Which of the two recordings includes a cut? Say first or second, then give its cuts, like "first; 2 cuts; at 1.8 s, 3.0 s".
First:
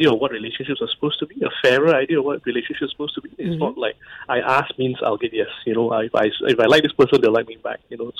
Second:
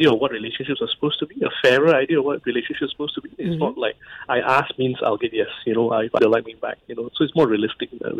second; 1 cut; at 6.2 s